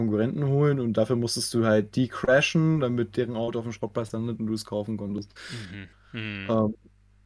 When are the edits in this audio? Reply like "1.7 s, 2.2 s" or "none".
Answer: 5.9 s